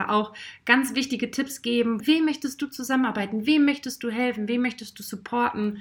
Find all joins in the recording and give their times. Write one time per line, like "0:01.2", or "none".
0:02.0